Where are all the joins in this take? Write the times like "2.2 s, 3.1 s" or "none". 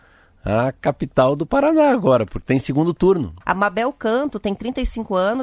3.4 s

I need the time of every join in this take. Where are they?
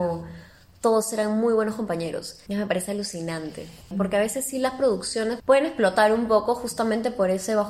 2.5 s, 3.9 s, 5.4 s

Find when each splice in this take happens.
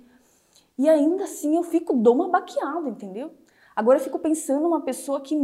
none

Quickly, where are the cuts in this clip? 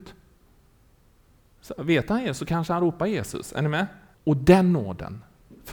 4.1 s

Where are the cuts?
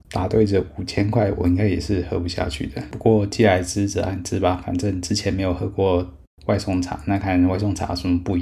7.2 s

